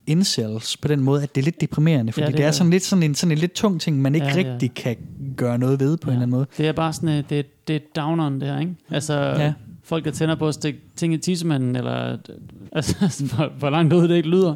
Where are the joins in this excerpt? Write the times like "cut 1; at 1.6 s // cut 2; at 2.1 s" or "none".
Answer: cut 1; at 6.5 s // cut 2; at 12.7 s